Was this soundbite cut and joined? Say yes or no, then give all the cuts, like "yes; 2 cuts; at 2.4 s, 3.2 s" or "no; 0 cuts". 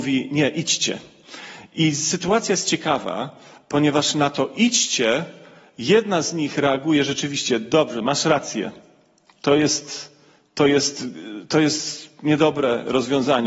no; 0 cuts